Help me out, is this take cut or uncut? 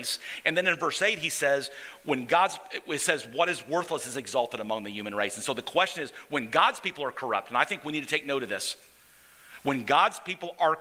uncut